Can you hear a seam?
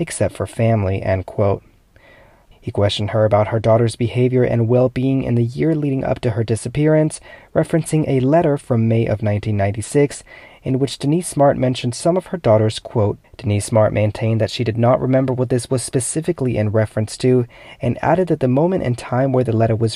yes; 2 cuts; at 2.5 s, 13.2 s

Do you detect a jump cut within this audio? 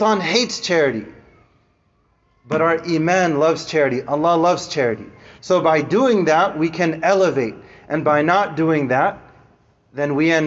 no; 0 cuts

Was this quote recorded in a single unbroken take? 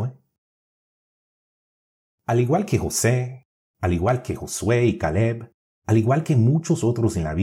yes; 0 cuts

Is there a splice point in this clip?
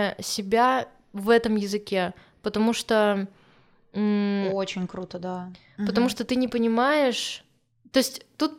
no; 0 cuts

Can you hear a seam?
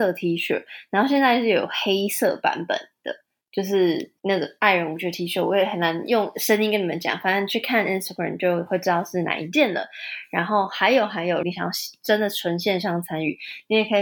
yes; 2 cuts; at 4.2 s, 11.4 s

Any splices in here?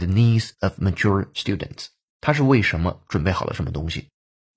yes; 1 cut; at 2.1 s

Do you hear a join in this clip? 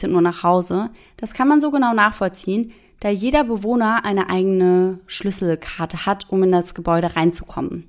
no; 0 cuts

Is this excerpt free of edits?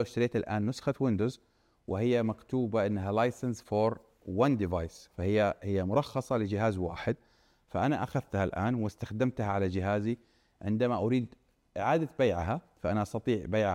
yes; 0 cuts

